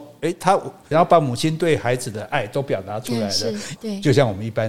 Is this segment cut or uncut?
cut